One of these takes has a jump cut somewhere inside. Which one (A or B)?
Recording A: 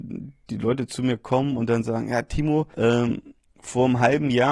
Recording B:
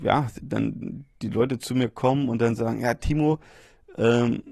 A